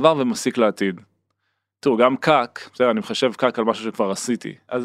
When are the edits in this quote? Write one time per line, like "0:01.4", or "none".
none